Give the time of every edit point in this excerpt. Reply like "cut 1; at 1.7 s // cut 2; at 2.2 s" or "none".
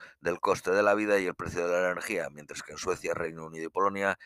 none

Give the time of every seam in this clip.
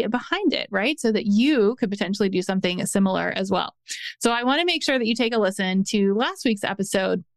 none

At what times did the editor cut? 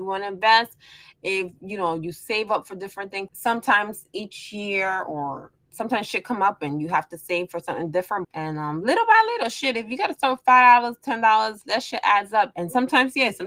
cut 1; at 3.3 s // cut 2; at 8.2 s // cut 3; at 12.5 s

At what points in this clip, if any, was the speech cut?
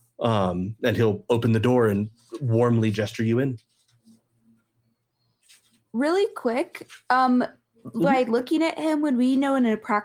none

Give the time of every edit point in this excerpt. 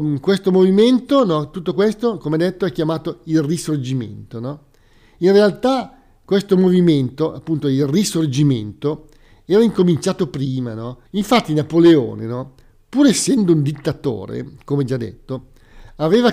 cut 1; at 11.0 s

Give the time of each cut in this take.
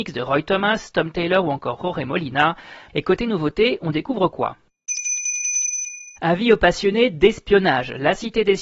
cut 1; at 2.9 s // cut 2; at 6.2 s

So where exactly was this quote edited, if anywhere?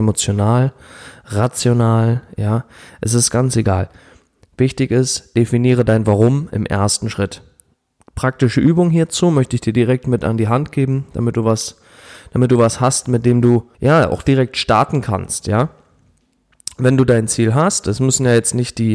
cut 1; at 13.7 s

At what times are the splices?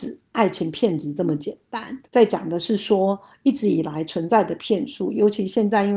cut 1; at 2.1 s

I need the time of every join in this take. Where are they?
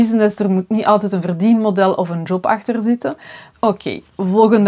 cut 1; at 3.5 s

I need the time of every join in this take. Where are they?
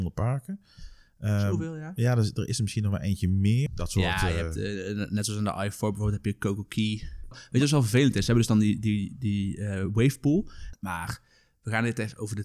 cut 1; at 3.7 s // cut 2; at 7.3 s // cut 3; at 10.7 s

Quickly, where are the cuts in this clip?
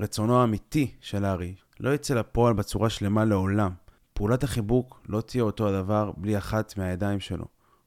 cut 1; at 1.6 s

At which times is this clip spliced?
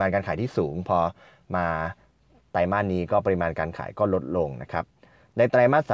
none

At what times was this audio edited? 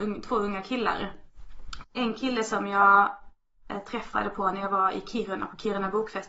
cut 1; at 1.8 s

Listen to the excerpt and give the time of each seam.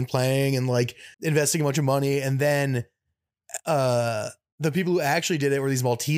cut 1; at 1.1 s

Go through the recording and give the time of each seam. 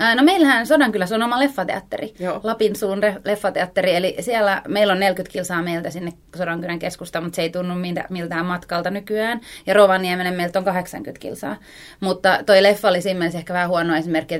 none

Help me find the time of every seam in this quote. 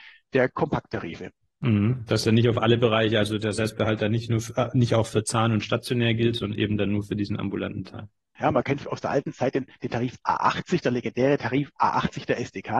cut 1; at 8.4 s

